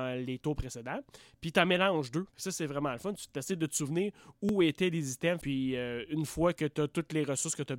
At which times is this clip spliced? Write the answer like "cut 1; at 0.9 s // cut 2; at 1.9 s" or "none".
cut 1; at 2.3 s // cut 2; at 5.4 s